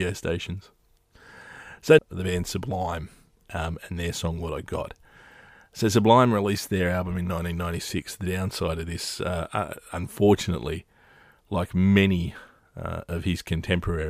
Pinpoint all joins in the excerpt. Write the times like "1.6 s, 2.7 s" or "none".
2.0 s